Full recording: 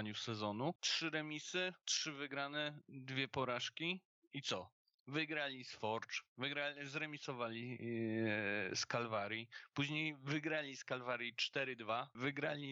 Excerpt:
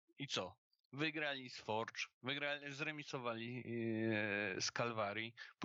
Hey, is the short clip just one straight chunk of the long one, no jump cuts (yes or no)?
yes